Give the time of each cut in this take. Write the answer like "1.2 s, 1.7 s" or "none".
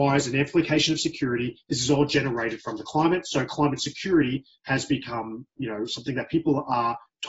none